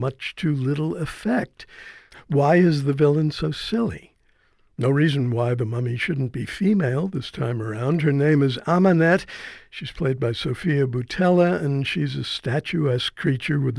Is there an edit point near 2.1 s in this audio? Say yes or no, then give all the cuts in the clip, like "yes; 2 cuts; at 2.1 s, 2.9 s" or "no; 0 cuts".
yes; 1 cut; at 2.1 s